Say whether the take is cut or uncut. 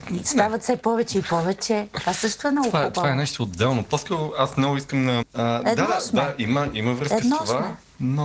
cut